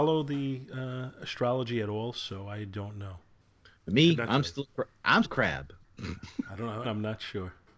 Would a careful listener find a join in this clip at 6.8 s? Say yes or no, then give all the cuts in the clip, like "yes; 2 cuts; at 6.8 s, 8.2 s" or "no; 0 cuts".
yes; 2 cuts; at 5.2 s, 6.8 s